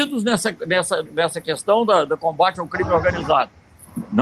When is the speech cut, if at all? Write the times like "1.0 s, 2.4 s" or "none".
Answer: 1.1 s